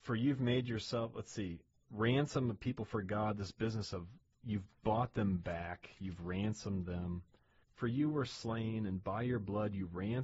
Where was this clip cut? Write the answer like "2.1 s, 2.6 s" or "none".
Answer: 7.6 s